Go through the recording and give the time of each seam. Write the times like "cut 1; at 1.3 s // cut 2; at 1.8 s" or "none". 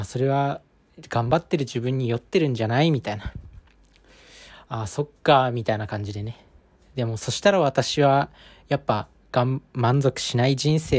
none